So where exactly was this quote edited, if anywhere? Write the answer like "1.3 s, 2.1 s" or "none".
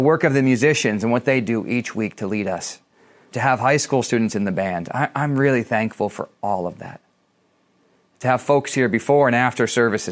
3.3 s